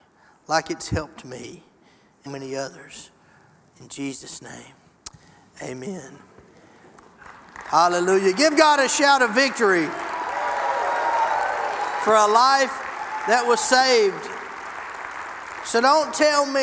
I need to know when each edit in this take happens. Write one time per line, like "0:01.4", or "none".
0:02.3